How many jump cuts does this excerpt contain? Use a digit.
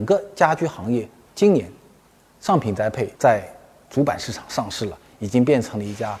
2